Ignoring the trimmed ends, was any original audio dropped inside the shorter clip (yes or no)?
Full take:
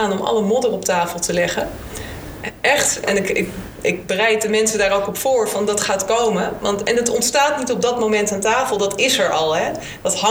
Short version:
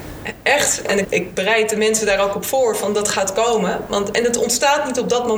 yes